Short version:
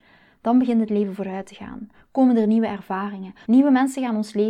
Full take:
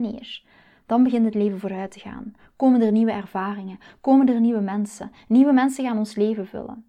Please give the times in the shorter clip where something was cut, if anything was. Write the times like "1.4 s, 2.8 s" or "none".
3.4 s